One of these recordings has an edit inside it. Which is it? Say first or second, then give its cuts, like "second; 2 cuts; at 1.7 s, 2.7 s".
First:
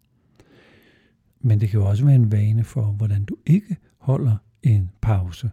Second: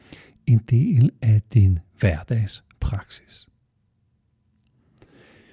first; 1 cut; at 1.3 s